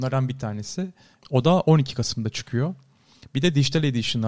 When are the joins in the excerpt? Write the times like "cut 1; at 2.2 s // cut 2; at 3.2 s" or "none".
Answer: cut 1; at 1.2 s

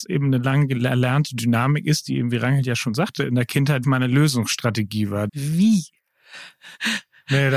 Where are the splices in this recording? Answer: cut 1; at 3.8 s // cut 2; at 5.3 s

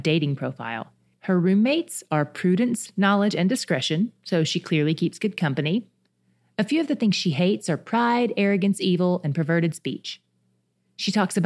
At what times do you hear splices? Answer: cut 1; at 1.2 s

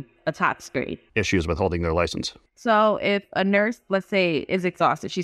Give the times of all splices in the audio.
cut 1; at 1.1 s

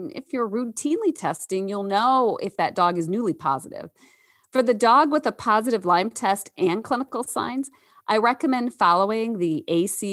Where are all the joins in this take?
none

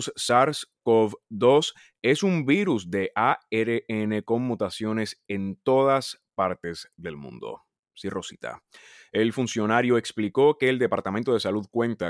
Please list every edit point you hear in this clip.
none

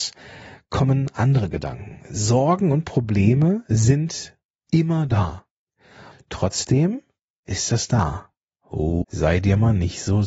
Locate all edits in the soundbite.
cut 1; at 6.1 s // cut 2; at 9.0 s

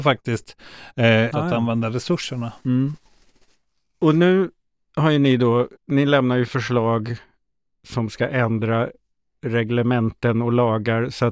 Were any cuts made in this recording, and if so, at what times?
cut 1; at 1.3 s // cut 2; at 5.8 s

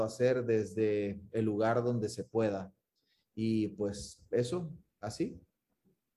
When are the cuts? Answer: none

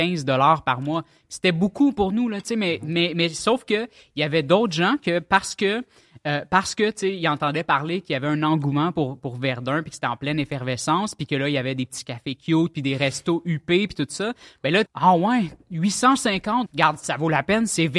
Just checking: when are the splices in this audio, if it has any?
cut 1; at 14.9 s // cut 2; at 16.7 s

